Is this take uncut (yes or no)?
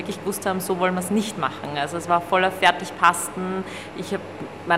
yes